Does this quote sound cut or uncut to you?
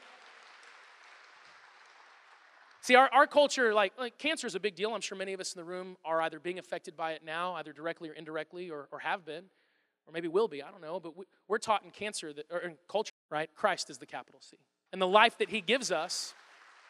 cut